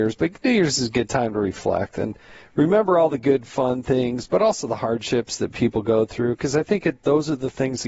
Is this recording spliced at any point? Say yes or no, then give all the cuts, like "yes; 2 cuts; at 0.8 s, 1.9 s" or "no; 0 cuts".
no; 0 cuts